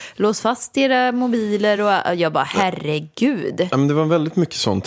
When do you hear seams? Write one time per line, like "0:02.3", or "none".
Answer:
none